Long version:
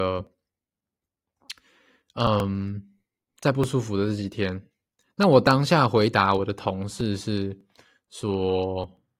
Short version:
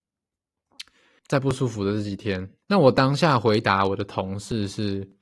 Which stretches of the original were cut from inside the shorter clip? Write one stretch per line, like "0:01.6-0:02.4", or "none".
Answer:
0:01.9-0:03.3
0:04.7-0:05.1